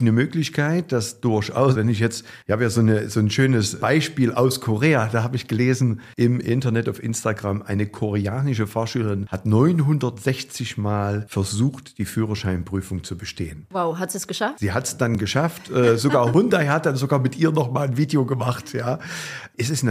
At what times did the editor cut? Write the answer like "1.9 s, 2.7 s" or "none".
1.7 s